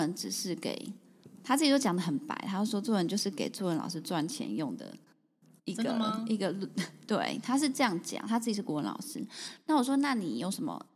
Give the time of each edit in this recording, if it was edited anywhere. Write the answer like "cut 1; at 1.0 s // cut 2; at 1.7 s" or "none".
none